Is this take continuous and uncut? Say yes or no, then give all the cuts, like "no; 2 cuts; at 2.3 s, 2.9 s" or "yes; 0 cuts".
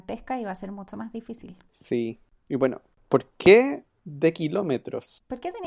yes; 0 cuts